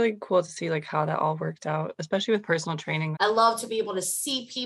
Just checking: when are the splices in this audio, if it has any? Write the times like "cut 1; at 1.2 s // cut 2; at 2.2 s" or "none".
cut 1; at 3.1 s